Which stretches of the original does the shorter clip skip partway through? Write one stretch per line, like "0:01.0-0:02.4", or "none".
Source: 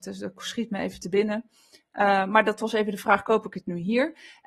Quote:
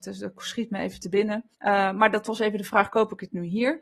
0:01.5-0:01.9

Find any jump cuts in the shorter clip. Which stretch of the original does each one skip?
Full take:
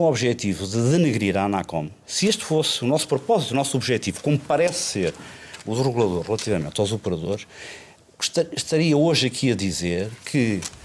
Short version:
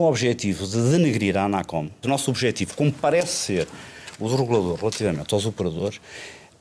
0:02.0-0:03.5

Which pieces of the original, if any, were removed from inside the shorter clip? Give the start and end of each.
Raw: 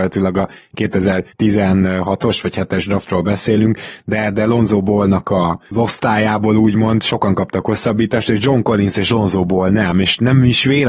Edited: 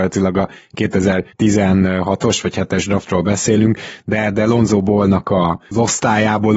none

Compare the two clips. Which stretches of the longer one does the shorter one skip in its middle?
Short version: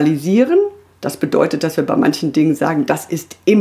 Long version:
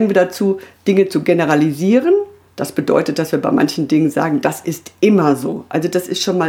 none

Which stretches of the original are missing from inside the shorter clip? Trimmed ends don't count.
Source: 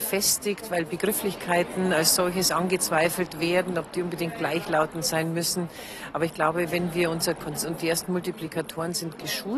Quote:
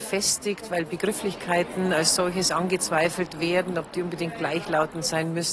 none

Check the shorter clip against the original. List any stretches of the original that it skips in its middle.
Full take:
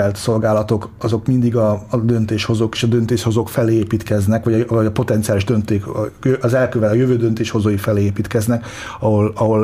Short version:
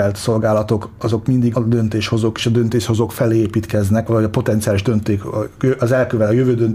0:01.5-0:01.9
0:04.4-0:04.7

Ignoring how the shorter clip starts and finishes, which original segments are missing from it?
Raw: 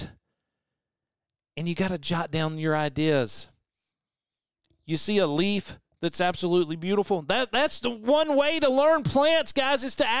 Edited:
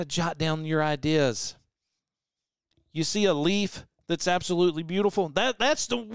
none

